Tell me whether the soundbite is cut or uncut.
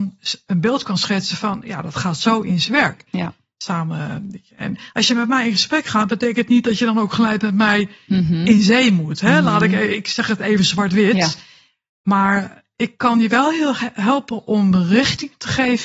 uncut